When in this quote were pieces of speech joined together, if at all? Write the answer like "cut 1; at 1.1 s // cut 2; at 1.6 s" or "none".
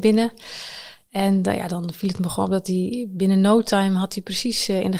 cut 1; at 1.7 s